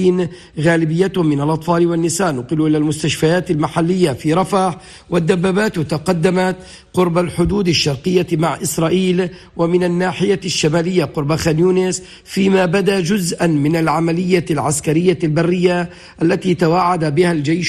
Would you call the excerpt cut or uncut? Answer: uncut